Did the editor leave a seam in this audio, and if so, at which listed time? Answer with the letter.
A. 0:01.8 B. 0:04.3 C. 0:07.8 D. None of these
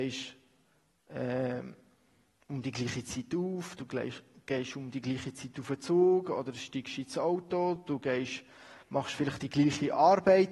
D